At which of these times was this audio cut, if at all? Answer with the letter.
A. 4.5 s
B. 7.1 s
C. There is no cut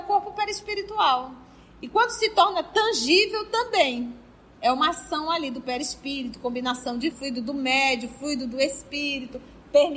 B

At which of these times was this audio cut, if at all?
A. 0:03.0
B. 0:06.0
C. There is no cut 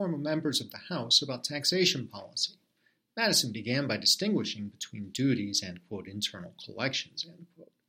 C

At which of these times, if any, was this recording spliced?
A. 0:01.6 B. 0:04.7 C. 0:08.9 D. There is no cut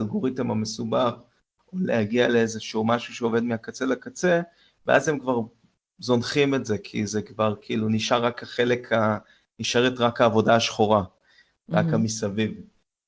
D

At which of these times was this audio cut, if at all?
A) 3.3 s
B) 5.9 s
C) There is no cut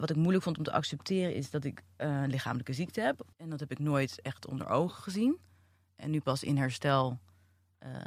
A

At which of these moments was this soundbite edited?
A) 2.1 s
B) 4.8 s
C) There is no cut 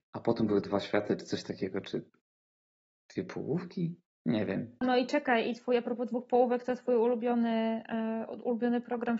B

